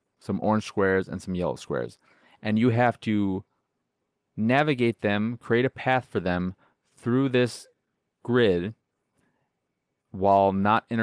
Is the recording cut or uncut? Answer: uncut